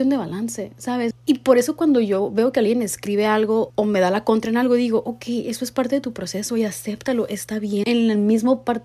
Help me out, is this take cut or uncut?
cut